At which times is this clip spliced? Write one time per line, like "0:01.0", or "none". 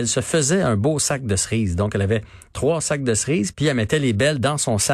0:03.5